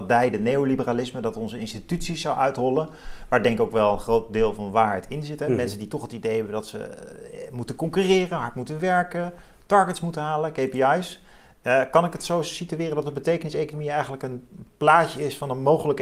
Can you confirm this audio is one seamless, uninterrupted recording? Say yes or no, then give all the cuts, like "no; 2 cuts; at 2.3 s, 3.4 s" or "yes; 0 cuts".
yes; 0 cuts